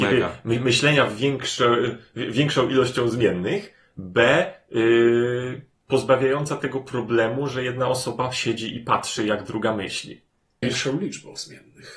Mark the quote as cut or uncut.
cut